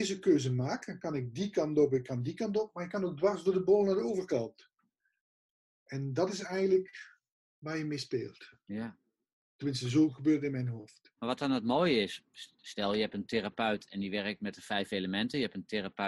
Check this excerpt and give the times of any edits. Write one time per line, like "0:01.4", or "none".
0:11.2